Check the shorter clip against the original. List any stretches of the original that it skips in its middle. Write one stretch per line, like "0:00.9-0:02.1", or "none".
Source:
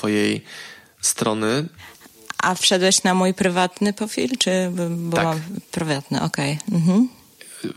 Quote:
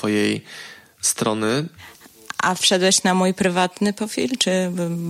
none